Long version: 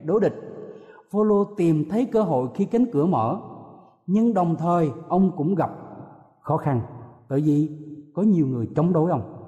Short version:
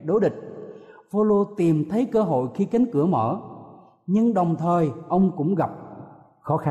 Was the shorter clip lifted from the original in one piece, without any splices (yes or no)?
yes